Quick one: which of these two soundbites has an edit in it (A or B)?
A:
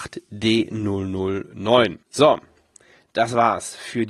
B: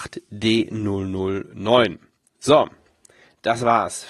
A